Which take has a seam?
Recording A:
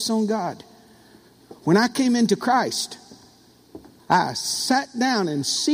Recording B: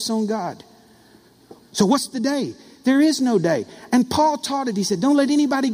B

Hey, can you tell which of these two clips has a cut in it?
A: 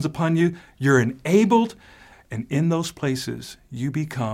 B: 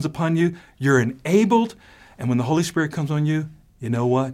A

